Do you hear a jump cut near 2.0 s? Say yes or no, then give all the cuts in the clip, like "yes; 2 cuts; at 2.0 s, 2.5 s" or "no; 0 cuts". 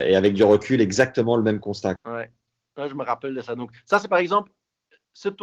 yes; 1 cut; at 2.0 s